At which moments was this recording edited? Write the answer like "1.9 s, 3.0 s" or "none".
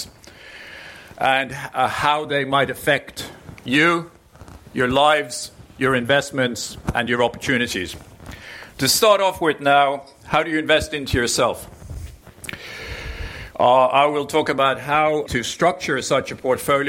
13.5 s, 15.3 s